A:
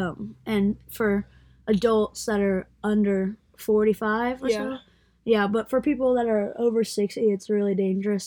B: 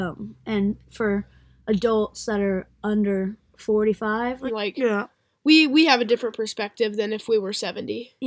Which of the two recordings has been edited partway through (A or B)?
B